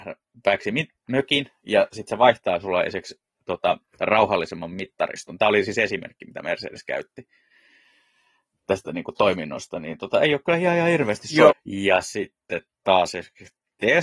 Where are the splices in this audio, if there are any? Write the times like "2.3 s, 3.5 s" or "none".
11.5 s